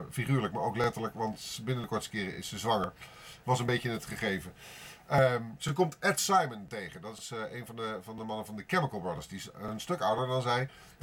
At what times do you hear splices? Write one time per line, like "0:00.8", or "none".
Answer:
0:03.4

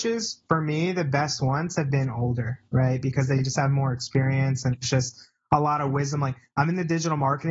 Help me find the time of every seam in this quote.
none

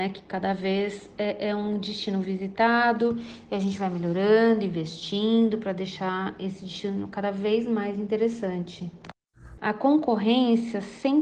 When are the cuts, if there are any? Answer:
0:09.6

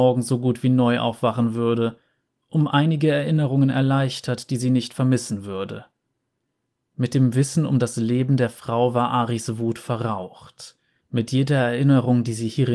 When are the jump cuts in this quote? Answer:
0:11.0

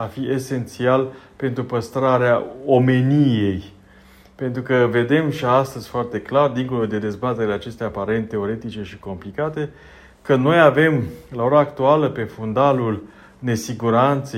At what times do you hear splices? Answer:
none

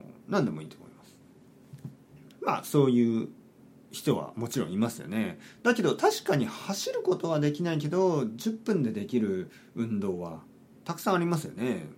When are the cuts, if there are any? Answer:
0:02.3

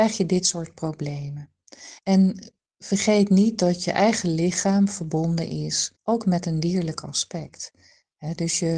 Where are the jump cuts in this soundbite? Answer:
0:02.0
0:05.9

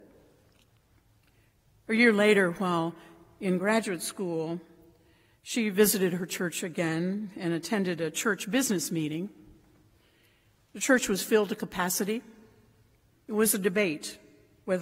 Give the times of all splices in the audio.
0:13.1

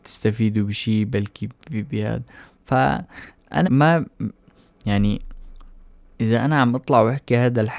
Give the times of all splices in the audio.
0:03.6

